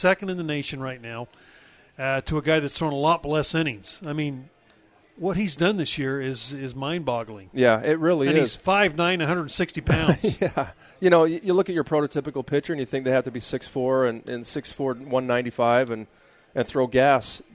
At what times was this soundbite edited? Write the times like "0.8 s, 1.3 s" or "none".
none